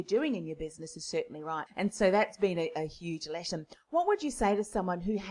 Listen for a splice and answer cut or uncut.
cut